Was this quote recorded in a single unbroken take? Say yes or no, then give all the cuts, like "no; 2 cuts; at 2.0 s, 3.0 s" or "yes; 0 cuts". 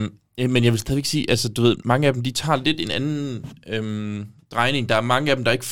yes; 0 cuts